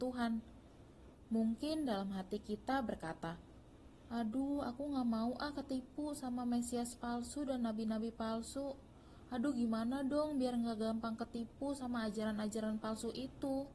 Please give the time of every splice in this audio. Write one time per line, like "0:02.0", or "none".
none